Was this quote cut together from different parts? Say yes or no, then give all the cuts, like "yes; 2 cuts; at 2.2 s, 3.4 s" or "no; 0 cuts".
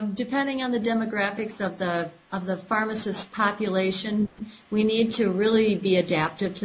no; 0 cuts